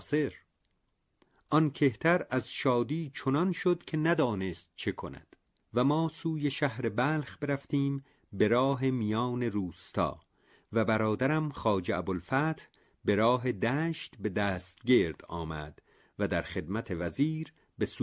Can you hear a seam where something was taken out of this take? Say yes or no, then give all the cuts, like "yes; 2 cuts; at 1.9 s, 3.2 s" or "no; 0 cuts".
no; 0 cuts